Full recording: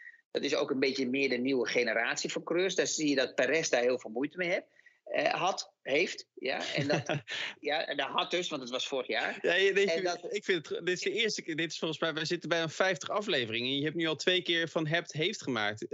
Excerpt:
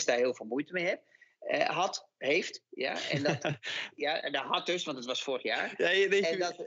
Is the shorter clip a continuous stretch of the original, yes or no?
yes